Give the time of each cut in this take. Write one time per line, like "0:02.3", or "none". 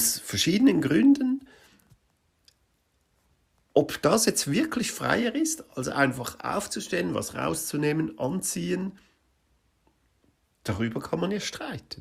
none